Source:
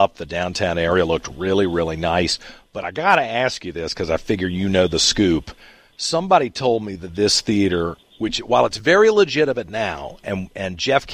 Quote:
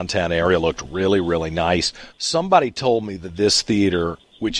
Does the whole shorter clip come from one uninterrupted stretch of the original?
no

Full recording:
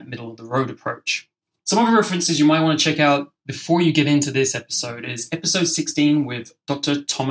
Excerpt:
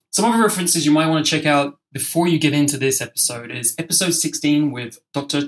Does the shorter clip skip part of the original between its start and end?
no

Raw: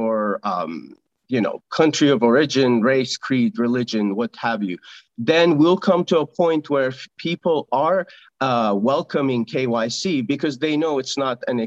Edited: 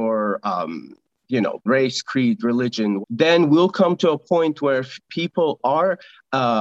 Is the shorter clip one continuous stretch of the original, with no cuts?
no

